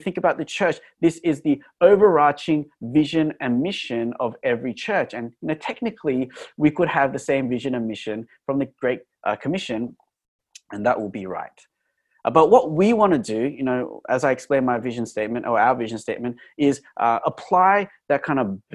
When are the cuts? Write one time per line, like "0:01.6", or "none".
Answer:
none